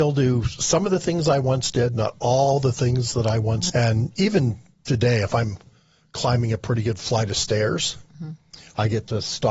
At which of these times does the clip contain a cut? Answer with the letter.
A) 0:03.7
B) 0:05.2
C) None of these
A